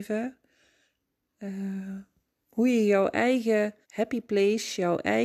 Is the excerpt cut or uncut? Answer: cut